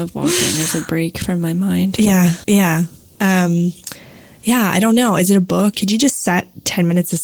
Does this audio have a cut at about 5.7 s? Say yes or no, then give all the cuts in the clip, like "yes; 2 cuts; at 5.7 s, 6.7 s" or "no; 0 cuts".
yes; 2 cuts; at 2.4 s, 5.7 s